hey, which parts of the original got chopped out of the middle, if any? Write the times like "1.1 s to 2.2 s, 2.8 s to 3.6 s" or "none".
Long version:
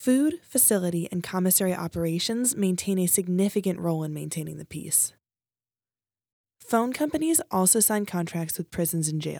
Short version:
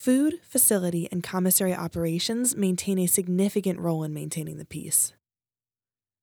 none